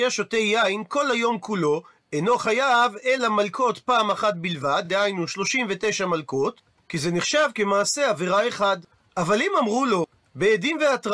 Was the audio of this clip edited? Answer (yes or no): no